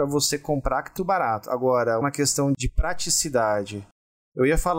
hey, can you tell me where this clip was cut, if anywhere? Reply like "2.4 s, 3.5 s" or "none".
1.0 s, 2.0 s

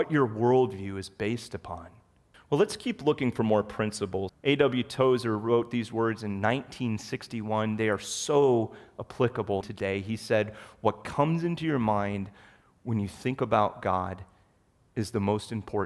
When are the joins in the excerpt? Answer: 2.3 s, 4.3 s, 9.6 s

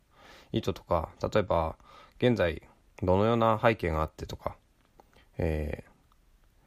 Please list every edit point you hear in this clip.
none

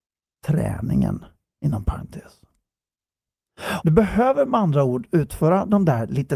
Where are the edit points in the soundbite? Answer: 3.8 s

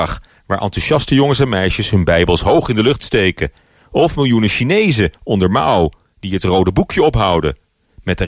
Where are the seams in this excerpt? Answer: none

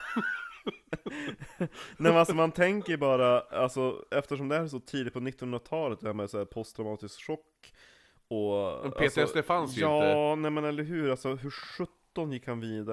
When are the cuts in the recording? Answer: none

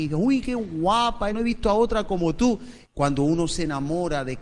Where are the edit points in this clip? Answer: 1.3 s, 2.8 s

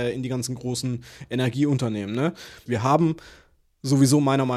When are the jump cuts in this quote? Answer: 2.7 s

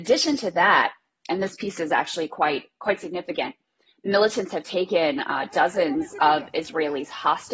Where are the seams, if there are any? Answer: none

